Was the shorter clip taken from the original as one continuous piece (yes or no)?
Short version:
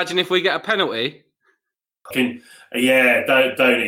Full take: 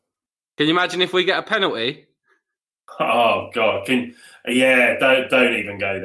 no